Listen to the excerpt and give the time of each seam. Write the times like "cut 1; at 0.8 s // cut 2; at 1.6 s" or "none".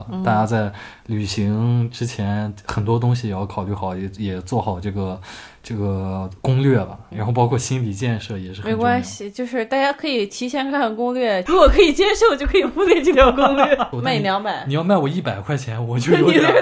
cut 1; at 7.1 s // cut 2; at 11.5 s // cut 3; at 13.9 s